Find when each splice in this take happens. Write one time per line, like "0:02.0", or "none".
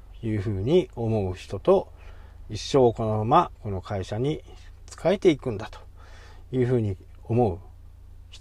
0:03.5